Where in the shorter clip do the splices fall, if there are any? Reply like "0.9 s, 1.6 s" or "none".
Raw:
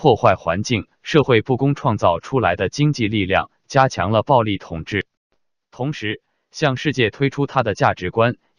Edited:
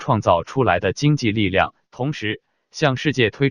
1.8 s